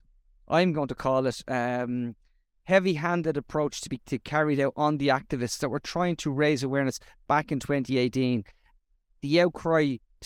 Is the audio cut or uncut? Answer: uncut